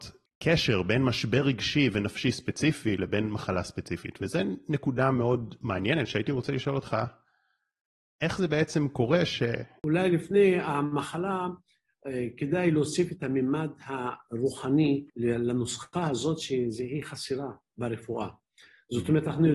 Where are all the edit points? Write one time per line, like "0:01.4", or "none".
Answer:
0:09.8
0:15.1